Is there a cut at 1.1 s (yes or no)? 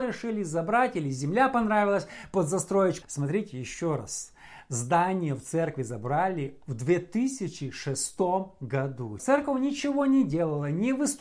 no